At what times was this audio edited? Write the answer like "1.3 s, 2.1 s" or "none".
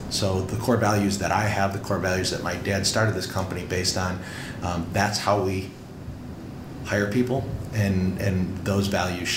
none

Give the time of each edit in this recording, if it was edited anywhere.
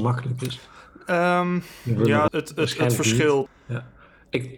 2.3 s, 3.5 s

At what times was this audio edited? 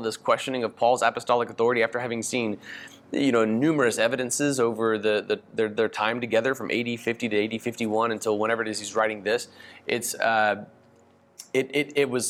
none

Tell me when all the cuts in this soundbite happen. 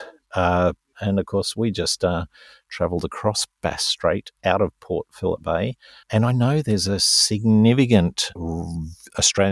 0.9 s, 6.0 s, 8.4 s

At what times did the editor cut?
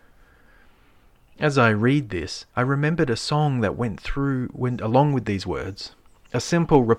2.5 s

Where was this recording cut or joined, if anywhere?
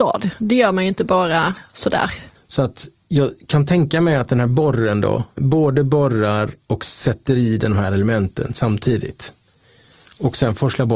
2.3 s, 5.4 s

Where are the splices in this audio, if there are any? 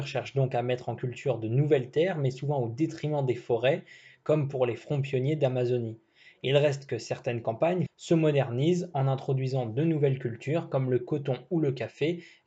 7.9 s

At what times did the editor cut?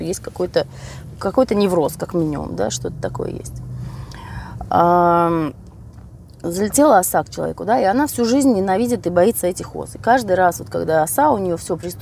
1.2 s

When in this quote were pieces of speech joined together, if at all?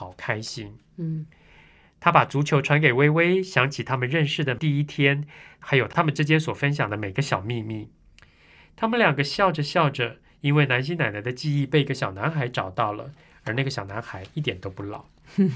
none

